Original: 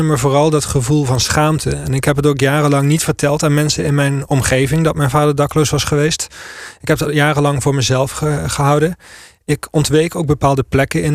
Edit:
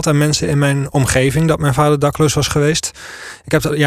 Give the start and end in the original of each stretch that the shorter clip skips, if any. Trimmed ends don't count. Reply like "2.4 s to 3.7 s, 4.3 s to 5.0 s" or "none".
none